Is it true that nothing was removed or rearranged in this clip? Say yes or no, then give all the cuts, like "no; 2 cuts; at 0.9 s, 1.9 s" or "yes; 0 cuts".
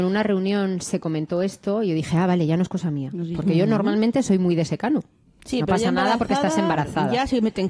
no; 1 cut; at 5.4 s